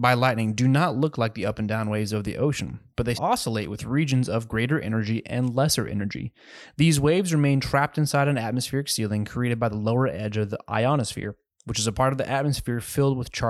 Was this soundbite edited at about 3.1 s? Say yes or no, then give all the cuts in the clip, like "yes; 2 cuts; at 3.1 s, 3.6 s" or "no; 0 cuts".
yes; 1 cut; at 3.1 s